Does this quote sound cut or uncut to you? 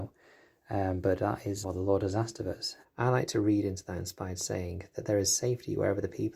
cut